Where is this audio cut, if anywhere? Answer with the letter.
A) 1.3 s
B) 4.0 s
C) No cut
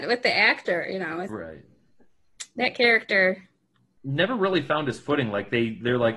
A